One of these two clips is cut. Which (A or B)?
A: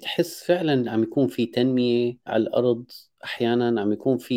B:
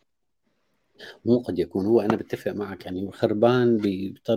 A